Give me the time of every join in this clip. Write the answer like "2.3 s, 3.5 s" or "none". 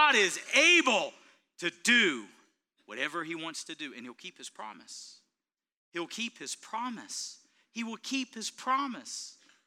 none

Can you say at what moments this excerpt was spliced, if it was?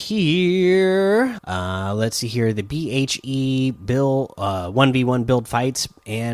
1.4 s

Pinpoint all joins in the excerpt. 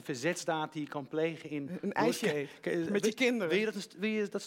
none

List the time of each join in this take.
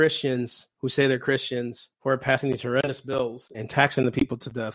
1.9 s, 3.5 s

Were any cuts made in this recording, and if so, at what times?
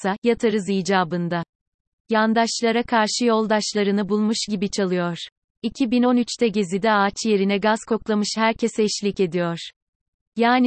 none

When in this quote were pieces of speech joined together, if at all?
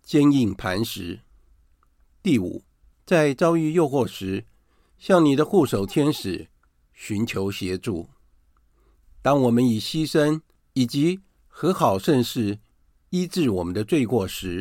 9.0 s

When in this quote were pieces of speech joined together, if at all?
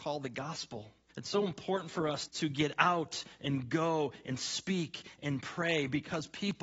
1.1 s, 2.3 s

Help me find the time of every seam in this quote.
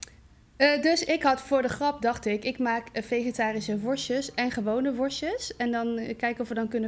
none

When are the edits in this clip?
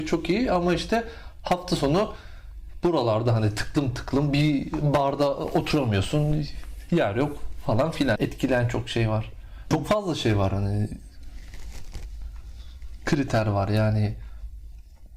8.2 s, 9.7 s

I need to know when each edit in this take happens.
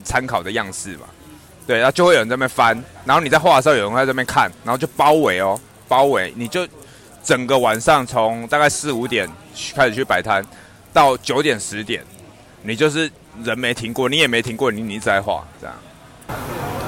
15.5 s

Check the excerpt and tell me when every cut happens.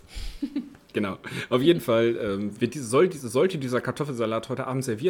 2.6 s

